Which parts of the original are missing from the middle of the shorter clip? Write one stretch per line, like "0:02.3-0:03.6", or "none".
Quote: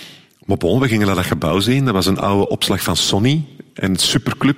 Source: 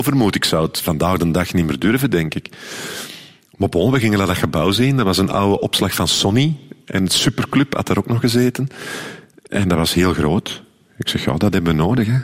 none